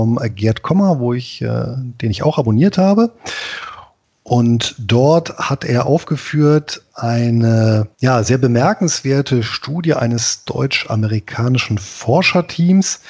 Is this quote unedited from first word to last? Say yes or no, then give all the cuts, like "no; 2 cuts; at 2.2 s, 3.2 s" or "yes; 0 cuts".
no; 1 cut; at 7.9 s